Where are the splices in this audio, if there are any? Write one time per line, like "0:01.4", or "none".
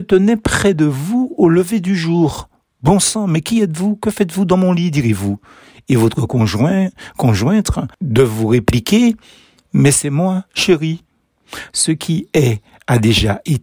0:11.7